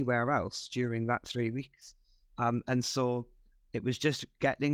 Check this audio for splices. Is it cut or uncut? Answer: uncut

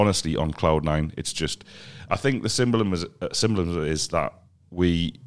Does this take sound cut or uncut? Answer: uncut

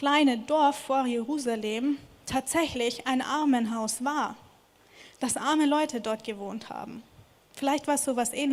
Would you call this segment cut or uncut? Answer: uncut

